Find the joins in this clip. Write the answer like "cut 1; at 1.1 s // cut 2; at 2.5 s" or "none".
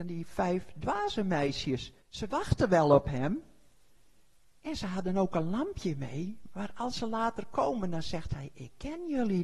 cut 1; at 2.0 s